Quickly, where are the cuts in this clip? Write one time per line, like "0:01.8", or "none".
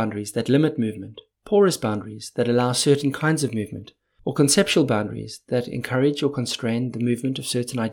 none